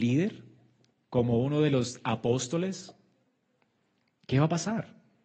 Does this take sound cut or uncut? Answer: uncut